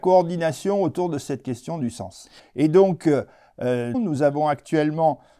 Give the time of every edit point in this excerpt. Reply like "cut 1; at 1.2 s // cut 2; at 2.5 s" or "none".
cut 1; at 2.4 s // cut 2; at 3.9 s

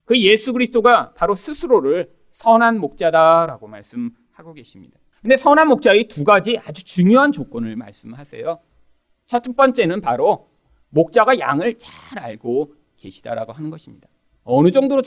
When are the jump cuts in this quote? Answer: cut 1; at 5.1 s

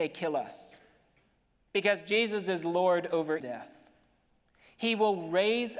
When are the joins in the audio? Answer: cut 1; at 3.4 s

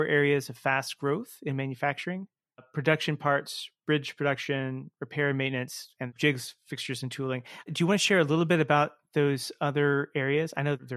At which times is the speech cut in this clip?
none

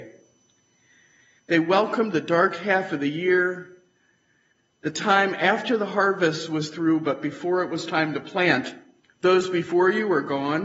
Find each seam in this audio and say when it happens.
cut 1; at 9.0 s

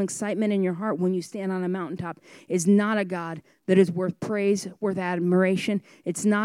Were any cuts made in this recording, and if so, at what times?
none

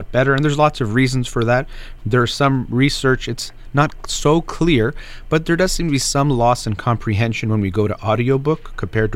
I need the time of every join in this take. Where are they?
cut 1; at 2.0 s

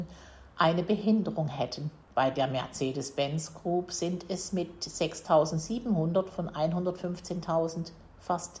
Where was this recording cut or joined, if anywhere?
cut 1; at 2.0 s

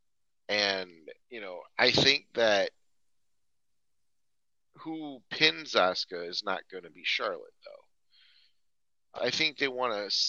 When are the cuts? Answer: cut 1; at 1.2 s // cut 2; at 9.2 s

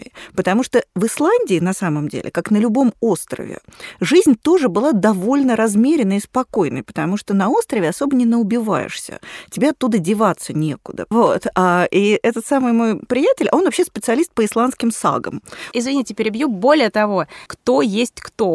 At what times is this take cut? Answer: cut 1; at 11.1 s // cut 2; at 15.7 s // cut 3; at 17.5 s

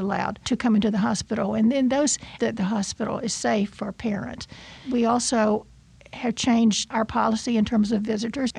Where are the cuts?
cut 1; at 2.4 s // cut 2; at 4.8 s

